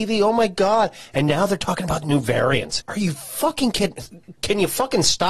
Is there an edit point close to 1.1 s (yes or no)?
no